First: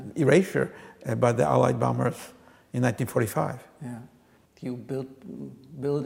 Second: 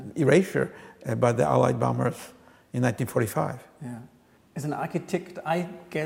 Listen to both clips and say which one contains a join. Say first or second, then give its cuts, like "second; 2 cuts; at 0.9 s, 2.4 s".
first; 1 cut; at 4.5 s